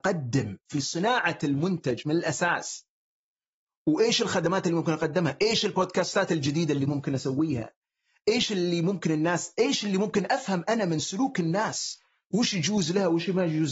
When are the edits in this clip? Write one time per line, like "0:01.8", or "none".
none